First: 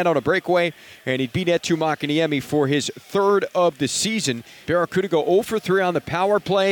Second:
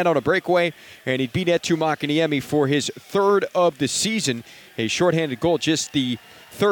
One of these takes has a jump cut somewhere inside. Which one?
first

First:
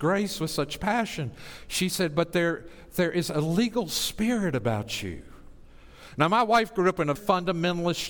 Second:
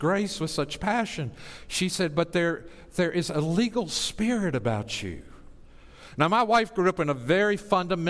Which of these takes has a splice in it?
first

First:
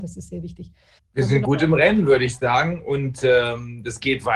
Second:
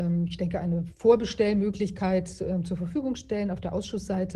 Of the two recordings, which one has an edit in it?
first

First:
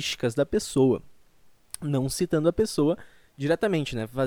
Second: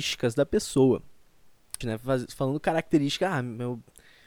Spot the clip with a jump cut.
second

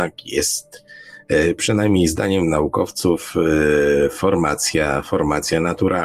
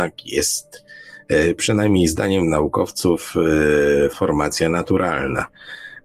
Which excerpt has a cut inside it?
second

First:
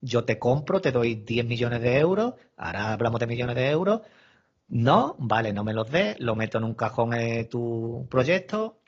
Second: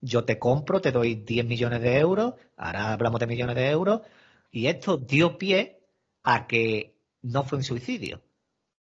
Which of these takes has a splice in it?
second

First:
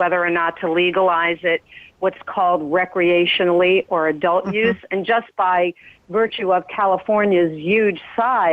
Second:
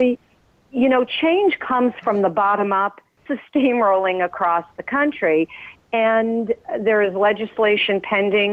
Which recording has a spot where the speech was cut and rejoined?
second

